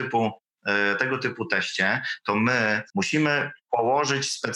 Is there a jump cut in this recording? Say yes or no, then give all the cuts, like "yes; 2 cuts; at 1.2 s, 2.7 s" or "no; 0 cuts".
no; 0 cuts